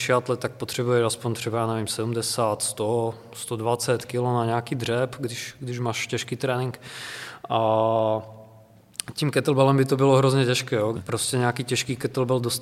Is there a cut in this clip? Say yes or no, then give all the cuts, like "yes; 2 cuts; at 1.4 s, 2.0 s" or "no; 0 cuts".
yes; 1 cut; at 10.9 s